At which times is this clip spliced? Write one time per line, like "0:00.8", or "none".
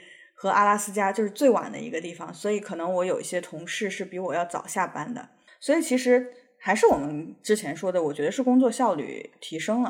0:05.5